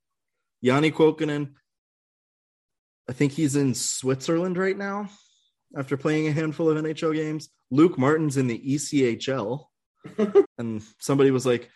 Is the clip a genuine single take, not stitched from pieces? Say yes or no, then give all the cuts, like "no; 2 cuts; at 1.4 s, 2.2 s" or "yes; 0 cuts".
no; 1 cut; at 10.4 s